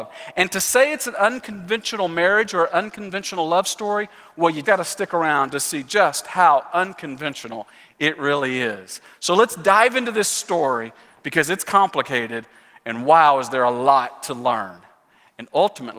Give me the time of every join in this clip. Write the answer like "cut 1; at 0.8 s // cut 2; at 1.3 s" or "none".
cut 1; at 4.6 s